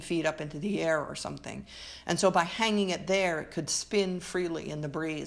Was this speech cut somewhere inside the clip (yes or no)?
no